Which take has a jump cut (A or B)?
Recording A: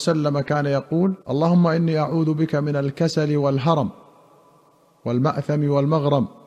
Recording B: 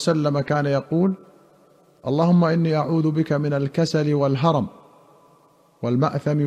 A